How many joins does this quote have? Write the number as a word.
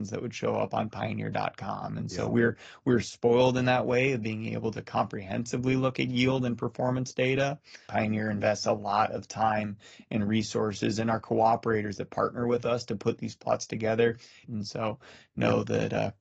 two